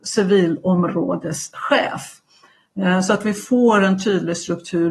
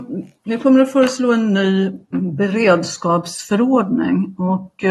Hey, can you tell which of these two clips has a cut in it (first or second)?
second